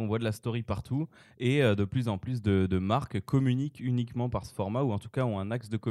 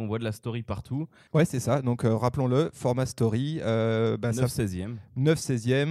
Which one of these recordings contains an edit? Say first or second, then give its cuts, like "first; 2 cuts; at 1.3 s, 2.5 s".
second; 1 cut; at 1.3 s